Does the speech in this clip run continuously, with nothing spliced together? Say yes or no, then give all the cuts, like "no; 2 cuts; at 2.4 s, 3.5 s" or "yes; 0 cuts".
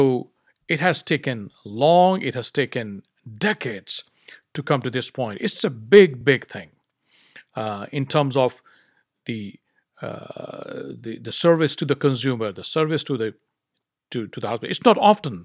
yes; 0 cuts